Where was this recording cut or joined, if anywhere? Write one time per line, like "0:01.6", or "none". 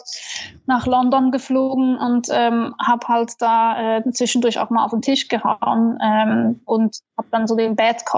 none